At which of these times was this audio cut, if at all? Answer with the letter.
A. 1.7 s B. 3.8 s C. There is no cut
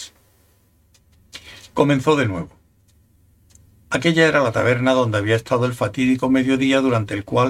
C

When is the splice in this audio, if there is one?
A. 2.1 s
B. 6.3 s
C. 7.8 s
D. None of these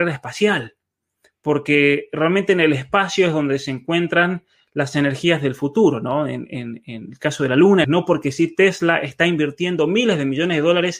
C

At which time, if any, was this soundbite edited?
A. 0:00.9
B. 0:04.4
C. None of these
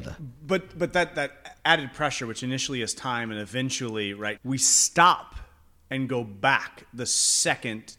B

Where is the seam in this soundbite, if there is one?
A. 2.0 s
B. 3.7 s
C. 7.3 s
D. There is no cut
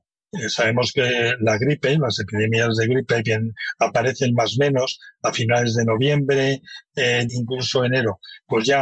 C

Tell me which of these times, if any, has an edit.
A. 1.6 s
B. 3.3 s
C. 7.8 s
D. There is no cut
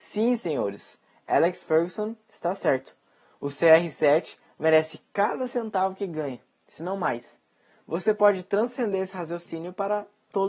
D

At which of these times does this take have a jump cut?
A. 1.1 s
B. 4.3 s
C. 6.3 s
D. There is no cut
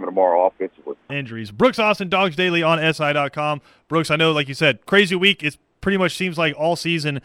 A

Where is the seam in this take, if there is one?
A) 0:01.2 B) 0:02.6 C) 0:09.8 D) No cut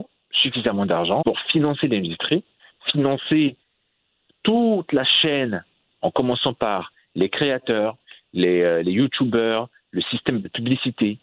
A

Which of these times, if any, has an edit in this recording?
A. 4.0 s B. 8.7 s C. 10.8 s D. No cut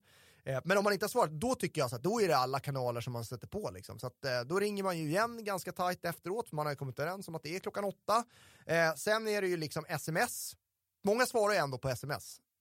D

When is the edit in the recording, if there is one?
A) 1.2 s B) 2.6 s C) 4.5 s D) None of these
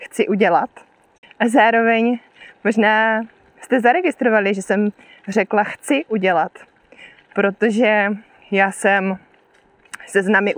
A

